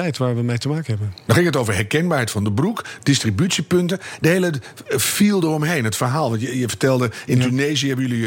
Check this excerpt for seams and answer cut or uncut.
uncut